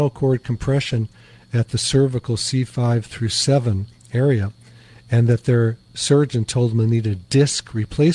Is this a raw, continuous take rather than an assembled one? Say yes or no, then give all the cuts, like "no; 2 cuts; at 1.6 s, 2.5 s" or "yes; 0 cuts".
yes; 0 cuts